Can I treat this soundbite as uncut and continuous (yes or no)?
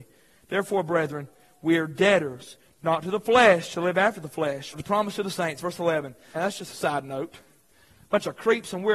no